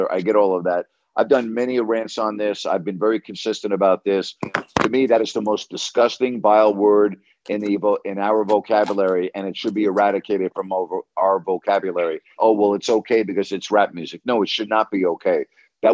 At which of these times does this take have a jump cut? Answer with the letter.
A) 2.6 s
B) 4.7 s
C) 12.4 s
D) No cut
C